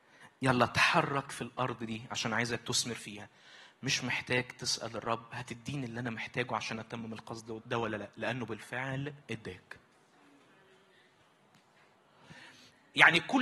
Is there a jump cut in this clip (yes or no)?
yes